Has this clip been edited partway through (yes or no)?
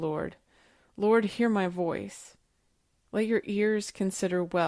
no